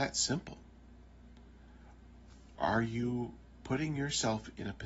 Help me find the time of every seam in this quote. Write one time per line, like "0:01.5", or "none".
0:02.6